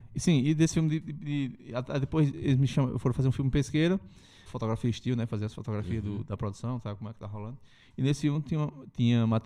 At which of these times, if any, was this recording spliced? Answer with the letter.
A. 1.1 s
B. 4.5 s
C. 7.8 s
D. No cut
B